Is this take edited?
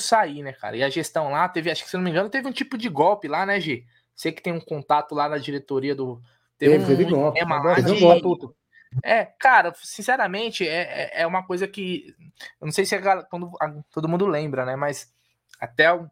no; 0 cuts

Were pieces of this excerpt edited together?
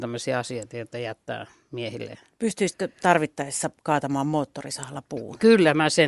no; 0 cuts

